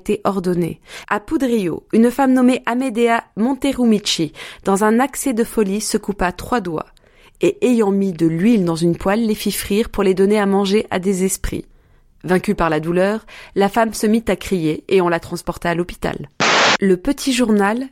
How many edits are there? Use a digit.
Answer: 1